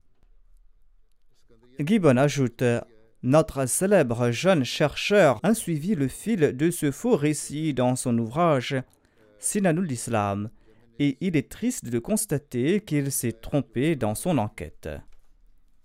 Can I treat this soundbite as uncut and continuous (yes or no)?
no